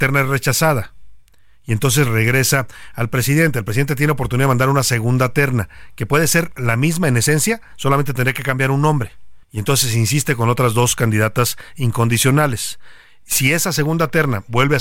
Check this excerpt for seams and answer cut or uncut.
cut